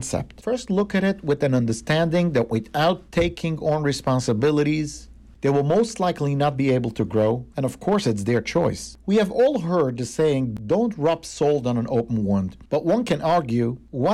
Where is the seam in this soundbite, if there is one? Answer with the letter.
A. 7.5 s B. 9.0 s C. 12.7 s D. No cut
A